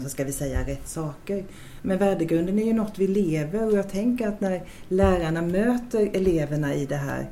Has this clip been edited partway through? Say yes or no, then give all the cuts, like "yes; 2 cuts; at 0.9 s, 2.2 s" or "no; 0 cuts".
no; 0 cuts